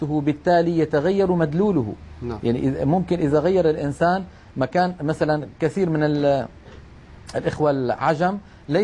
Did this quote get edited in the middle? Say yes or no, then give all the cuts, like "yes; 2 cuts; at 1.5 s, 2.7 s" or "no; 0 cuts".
no; 0 cuts